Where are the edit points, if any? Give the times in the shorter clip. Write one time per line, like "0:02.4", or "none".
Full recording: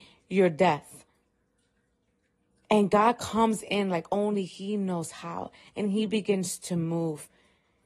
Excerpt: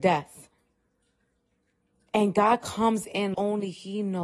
0:03.3